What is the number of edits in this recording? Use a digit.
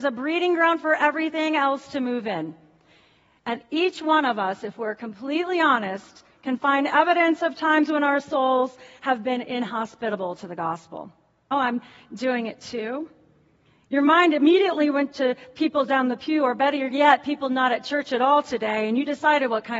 1